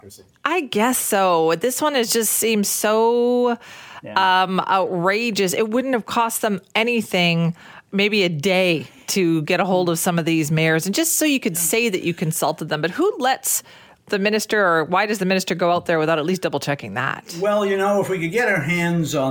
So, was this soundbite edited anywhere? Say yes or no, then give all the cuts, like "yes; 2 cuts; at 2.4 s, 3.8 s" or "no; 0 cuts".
no; 0 cuts